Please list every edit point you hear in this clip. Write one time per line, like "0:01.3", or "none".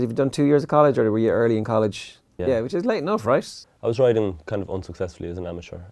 0:02.4
0:03.6